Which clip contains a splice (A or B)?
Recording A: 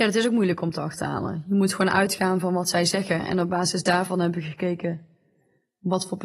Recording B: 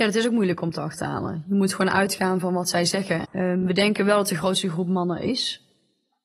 B